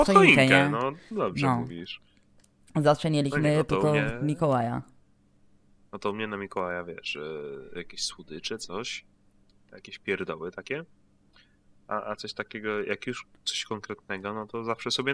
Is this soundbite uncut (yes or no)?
yes